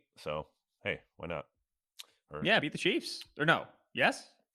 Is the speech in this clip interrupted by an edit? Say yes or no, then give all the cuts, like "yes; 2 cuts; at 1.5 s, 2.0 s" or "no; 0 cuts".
yes; 1 cut; at 2.6 s